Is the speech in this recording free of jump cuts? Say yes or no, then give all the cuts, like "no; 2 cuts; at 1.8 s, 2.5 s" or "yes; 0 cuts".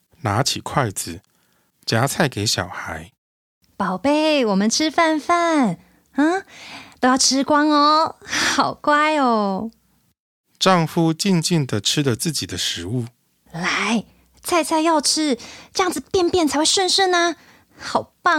yes; 0 cuts